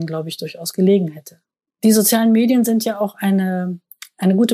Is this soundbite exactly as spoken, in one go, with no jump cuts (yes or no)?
yes